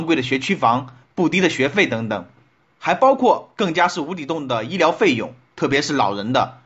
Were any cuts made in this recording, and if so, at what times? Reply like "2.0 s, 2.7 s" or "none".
none